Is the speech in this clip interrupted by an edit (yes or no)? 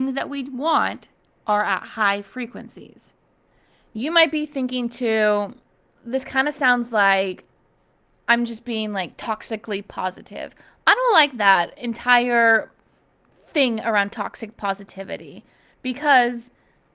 yes